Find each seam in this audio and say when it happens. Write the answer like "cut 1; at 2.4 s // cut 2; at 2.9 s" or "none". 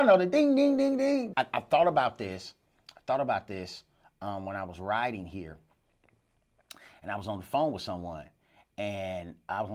cut 1; at 1.3 s